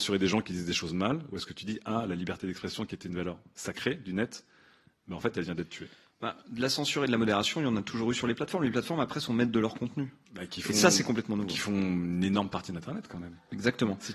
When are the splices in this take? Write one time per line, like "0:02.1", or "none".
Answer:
0:10.2